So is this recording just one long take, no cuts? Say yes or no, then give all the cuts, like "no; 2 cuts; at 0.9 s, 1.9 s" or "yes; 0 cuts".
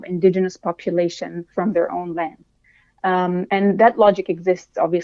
no; 2 cuts; at 1.5 s, 3.5 s